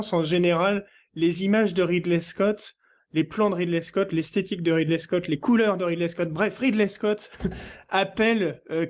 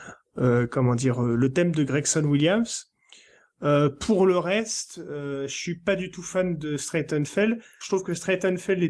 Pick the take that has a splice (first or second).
second